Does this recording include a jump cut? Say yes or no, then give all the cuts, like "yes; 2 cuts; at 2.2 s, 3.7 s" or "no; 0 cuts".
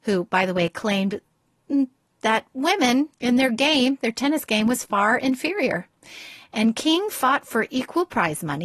yes; 1 cut; at 3.1 s